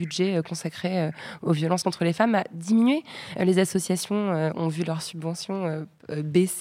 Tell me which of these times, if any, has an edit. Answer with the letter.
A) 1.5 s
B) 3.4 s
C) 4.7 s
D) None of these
D